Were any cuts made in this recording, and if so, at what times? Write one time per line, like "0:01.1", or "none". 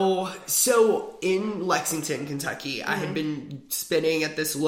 none